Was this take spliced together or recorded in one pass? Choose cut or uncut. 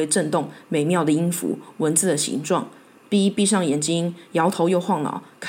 uncut